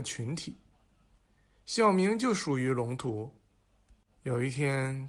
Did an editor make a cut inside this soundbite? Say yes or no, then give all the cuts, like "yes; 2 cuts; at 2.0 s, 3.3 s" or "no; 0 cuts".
no; 0 cuts